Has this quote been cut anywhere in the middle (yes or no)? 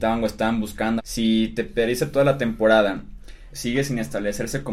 yes